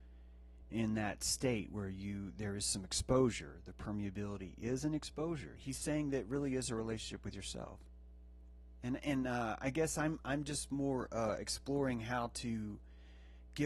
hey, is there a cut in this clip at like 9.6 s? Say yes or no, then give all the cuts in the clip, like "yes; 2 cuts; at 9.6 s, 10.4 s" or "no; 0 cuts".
no; 1 cut; at 5.6 s